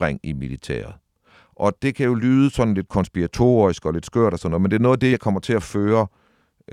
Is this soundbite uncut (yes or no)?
yes